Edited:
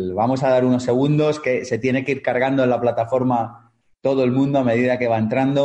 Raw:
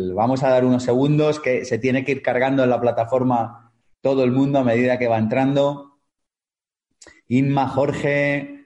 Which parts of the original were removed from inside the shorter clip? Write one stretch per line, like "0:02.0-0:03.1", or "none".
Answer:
none

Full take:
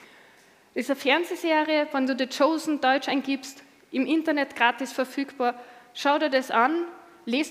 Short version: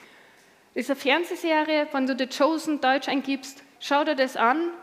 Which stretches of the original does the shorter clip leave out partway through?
0:03.8-0:05.9

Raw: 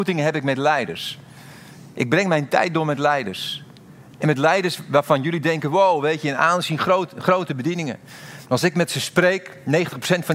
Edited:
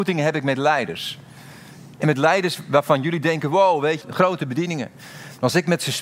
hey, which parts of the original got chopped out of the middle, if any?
0:01.9-0:04.1
0:06.2-0:07.1

